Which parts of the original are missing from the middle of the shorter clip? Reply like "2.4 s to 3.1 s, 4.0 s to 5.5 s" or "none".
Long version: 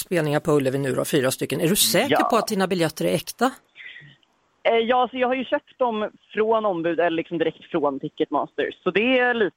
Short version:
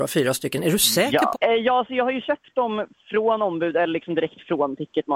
2.3 s to 4.6 s